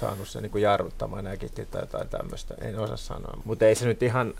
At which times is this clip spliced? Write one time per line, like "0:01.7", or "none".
0:03.4